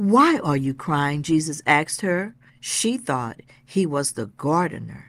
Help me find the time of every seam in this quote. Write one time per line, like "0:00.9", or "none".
0:02.5